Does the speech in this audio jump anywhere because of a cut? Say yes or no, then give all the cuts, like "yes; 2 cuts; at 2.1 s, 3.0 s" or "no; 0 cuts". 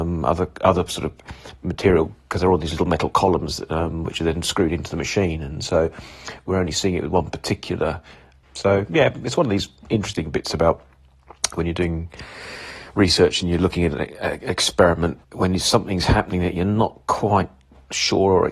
yes; 2 cuts; at 8.4 s, 15.2 s